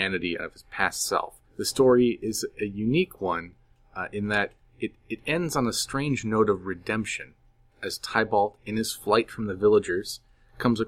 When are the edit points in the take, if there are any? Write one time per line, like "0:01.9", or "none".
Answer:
0:01.4